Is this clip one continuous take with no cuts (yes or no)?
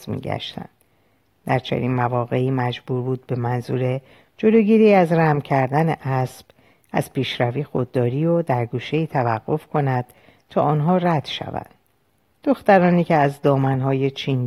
no